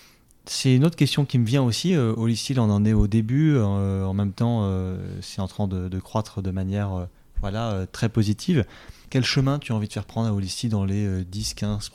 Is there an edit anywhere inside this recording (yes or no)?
no